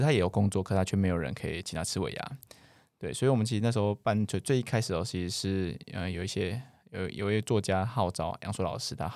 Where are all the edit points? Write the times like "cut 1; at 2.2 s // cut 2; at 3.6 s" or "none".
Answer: none